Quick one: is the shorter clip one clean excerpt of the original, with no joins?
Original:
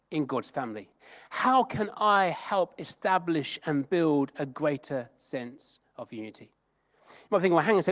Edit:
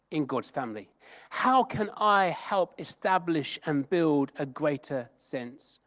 yes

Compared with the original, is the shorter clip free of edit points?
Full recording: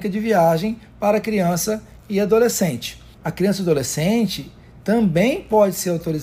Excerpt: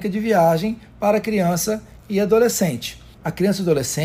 yes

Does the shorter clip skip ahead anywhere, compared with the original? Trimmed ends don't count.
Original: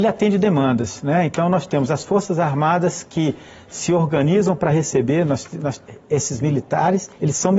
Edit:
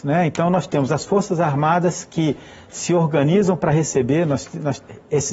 no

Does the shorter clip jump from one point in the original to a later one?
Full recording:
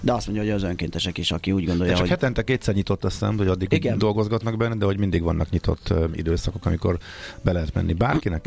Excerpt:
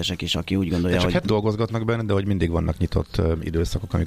yes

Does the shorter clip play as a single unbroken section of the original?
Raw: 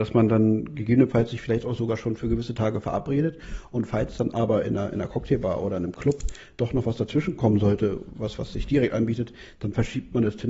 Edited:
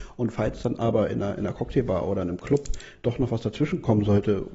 yes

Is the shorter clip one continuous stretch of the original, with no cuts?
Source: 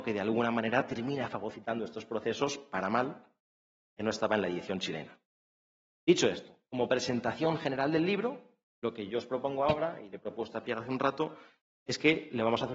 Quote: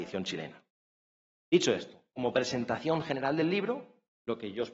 yes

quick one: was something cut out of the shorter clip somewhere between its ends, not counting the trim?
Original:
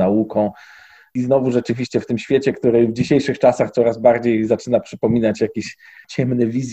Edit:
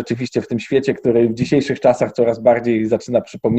no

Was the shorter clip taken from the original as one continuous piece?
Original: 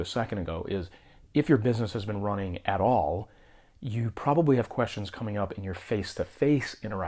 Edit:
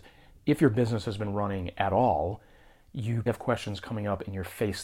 no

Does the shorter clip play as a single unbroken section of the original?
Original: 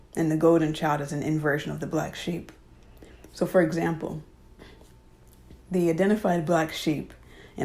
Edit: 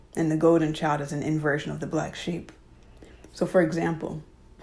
yes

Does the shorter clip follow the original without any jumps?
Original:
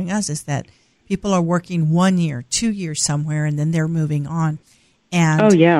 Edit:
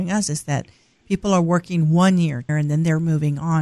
no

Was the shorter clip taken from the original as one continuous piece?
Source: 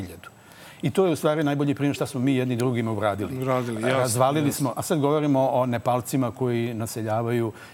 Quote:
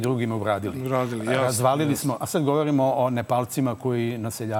yes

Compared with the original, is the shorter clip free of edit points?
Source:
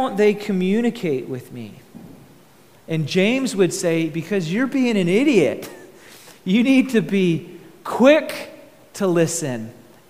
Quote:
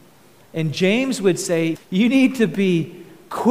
no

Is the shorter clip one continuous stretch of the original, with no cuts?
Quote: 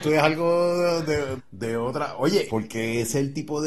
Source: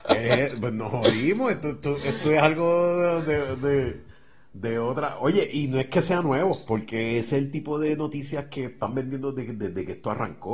no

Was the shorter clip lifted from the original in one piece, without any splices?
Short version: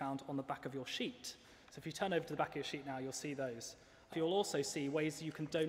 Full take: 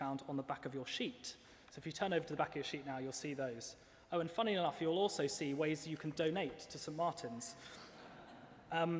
no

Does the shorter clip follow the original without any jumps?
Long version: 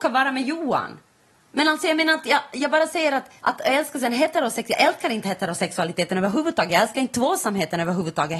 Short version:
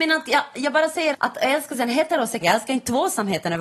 no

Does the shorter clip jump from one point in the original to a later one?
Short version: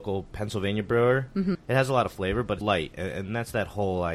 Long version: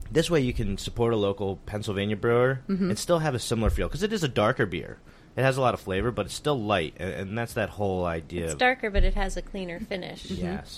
yes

